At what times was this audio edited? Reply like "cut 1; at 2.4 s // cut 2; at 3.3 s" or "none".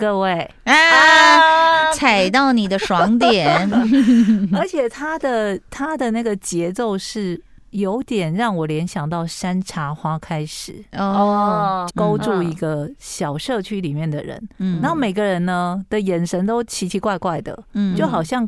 cut 1; at 11.9 s